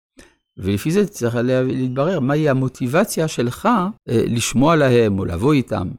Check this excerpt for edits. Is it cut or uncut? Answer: cut